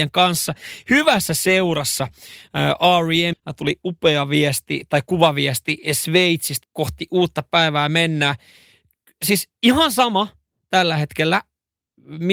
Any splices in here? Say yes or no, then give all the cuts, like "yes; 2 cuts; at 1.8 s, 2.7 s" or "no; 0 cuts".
yes; 2 cuts; at 3.3 s, 6.6 s